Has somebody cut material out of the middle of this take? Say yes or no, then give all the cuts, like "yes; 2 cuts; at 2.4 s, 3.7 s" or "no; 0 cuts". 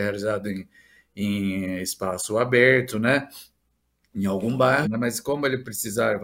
yes; 1 cut; at 4.8 s